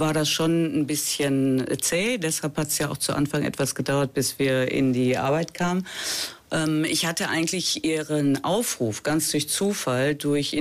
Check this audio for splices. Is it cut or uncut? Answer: uncut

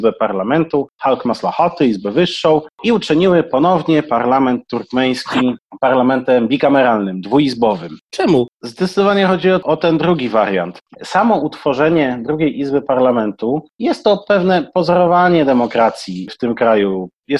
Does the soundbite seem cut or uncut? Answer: cut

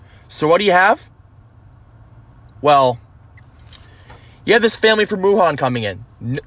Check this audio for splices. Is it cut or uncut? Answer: uncut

